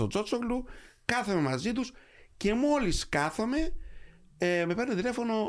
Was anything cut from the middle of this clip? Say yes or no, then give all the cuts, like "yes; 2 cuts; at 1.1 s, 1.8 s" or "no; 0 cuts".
no; 0 cuts